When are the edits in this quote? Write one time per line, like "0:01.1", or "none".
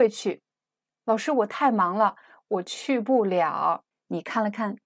0:03.9